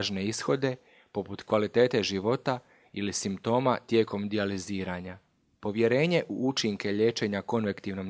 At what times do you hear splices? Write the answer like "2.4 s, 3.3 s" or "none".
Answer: 5.6 s